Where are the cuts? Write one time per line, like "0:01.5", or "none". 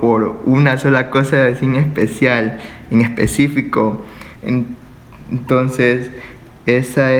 0:04.4